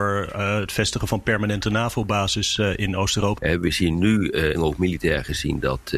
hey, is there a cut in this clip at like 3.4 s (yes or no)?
yes